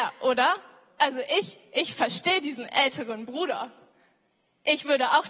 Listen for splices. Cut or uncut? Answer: uncut